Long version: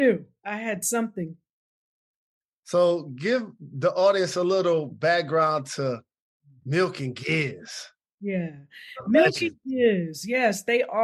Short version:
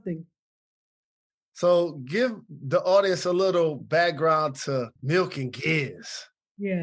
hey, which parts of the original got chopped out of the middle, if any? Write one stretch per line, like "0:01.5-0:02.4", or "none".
0:06.1-0:06.6